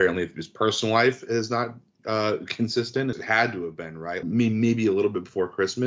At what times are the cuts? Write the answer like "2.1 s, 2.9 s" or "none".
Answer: 3.1 s, 4.2 s